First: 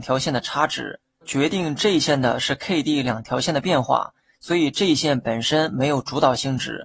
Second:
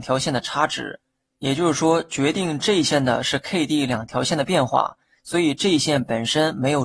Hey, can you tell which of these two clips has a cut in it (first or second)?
first